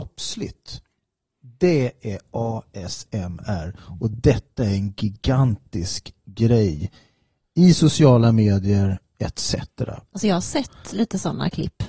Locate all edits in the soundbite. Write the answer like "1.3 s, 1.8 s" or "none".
none